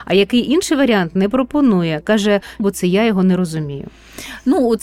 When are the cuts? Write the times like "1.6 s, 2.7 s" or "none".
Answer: 2.6 s

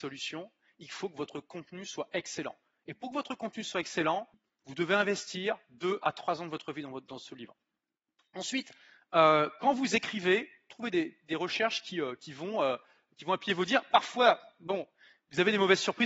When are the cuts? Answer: none

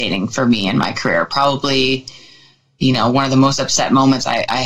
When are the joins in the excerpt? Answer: none

